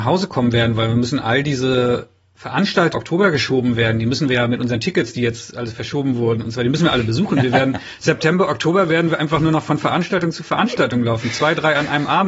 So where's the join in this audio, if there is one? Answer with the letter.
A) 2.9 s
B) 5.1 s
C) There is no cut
A